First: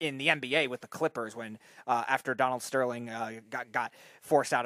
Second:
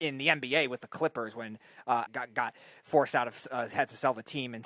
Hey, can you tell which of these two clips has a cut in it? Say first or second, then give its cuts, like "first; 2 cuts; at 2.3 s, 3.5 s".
second; 1 cut; at 2.1 s